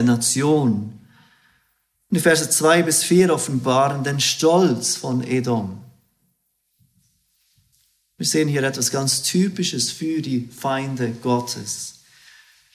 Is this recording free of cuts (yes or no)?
yes